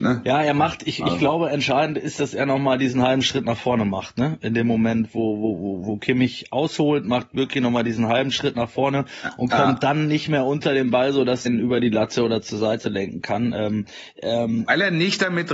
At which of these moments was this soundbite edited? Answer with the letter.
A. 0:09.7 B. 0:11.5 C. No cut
B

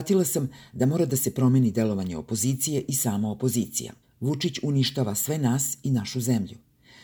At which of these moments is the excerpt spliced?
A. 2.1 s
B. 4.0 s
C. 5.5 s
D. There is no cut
B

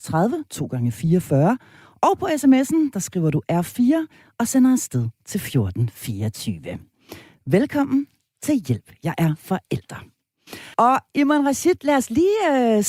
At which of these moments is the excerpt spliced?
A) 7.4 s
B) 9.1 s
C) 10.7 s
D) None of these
C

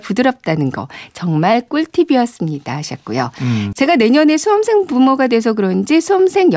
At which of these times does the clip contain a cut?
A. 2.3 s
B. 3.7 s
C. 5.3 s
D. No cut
B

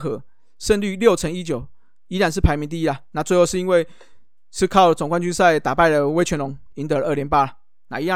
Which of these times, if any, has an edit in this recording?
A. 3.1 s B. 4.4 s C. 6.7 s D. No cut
C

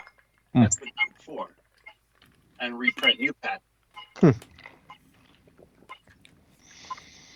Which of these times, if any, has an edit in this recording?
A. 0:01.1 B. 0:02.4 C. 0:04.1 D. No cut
D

